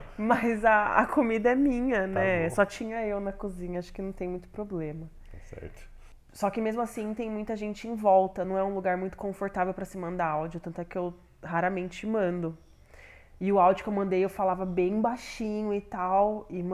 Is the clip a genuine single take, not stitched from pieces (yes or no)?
yes